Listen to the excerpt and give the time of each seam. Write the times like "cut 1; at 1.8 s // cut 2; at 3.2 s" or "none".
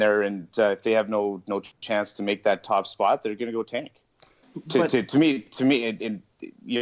cut 1; at 4.4 s